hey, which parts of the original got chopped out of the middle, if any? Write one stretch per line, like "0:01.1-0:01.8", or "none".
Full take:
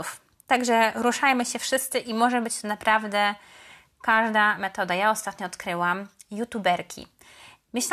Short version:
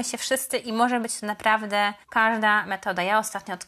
0:03.4-0:03.9